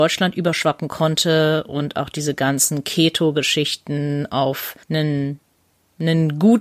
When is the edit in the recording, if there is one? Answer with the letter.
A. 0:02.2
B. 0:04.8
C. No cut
B